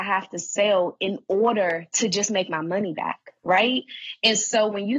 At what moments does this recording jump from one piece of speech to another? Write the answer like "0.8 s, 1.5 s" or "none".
none